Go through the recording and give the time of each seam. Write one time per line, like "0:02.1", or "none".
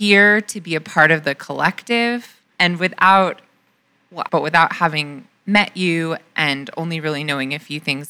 0:02.5
0:04.3